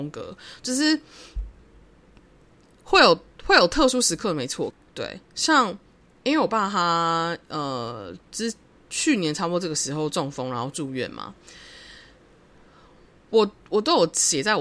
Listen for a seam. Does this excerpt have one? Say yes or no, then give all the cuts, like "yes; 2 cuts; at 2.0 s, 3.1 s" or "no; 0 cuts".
yes; 1 cut; at 4.7 s